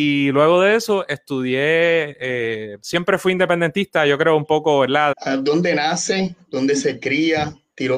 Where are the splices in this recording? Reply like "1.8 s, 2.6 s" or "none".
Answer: 5.1 s